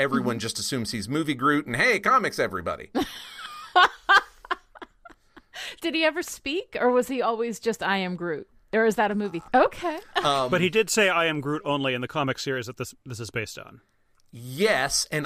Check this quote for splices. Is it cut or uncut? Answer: cut